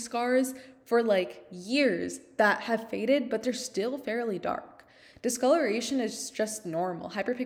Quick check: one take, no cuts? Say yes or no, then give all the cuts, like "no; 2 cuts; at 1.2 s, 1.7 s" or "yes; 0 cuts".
yes; 0 cuts